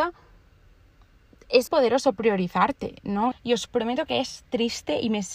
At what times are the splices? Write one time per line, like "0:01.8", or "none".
0:01.7
0:03.3